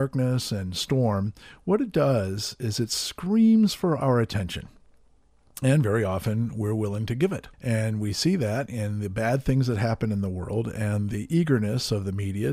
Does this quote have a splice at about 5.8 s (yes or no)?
no